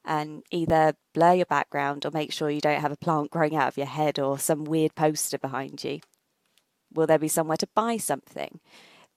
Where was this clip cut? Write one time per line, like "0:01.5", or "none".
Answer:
0:06.9